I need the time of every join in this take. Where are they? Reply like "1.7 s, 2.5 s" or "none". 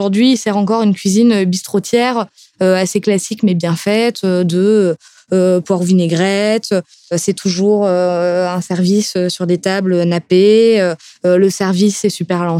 none